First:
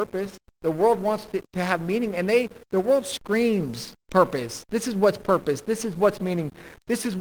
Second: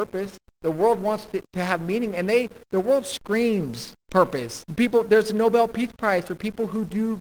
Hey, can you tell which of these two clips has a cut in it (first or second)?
second